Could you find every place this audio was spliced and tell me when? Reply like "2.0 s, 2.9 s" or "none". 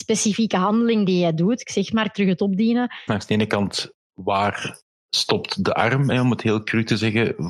3.1 s